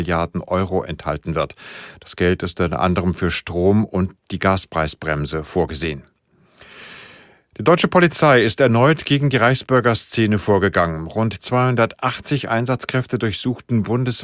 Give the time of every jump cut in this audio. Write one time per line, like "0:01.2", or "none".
none